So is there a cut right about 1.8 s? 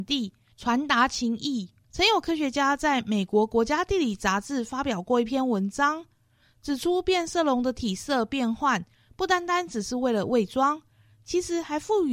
yes; 1 cut; at 1.8 s

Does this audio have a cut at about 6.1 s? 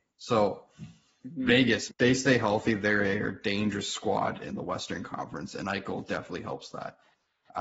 no; 1 cut; at 1.9 s

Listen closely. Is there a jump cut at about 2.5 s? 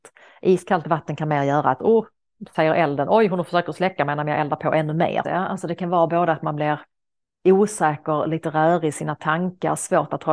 no; 1 cut; at 5.2 s

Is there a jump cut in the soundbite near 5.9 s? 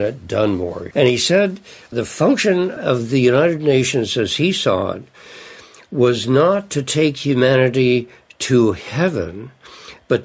no; 1 cut; at 0.9 s

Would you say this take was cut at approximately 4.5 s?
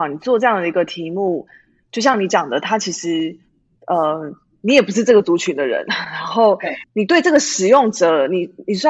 no; 1 cut; at 6.8 s

